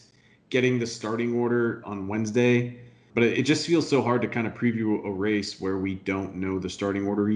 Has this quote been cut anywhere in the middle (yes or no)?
yes